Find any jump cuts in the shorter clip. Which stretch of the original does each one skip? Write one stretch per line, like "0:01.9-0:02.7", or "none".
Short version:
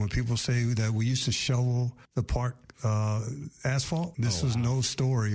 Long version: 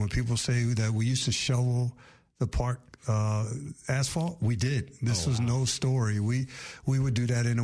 0:02.0-0:02.3
0:04.4-0:05.0